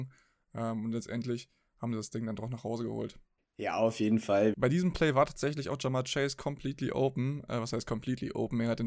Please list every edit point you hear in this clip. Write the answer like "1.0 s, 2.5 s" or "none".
3.4 s, 4.5 s